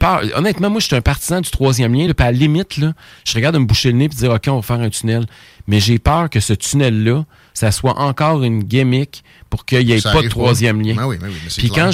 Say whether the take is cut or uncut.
uncut